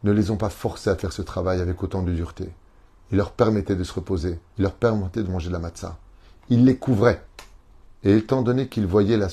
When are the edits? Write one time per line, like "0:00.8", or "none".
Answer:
0:04.5
0:07.8